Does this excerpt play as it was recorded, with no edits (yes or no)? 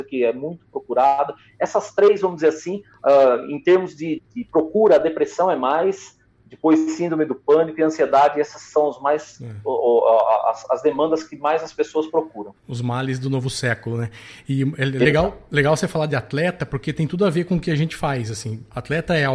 no